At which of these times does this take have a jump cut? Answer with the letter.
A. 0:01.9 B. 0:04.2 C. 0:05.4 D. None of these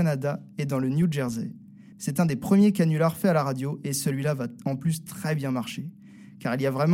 A